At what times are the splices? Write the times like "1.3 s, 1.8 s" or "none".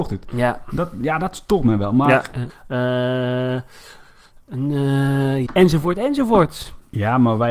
2.5 s, 5.5 s